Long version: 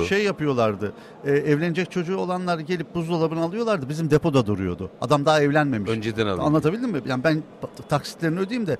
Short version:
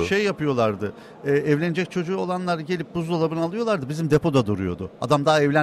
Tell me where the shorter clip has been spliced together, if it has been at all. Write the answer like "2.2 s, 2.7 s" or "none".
none